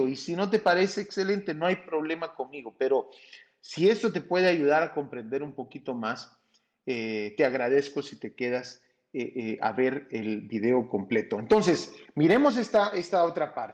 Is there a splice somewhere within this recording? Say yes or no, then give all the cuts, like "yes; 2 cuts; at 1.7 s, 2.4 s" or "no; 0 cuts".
no; 0 cuts